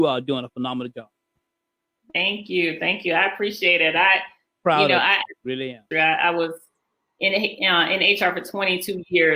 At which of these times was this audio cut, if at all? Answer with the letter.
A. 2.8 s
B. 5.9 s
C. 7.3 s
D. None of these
B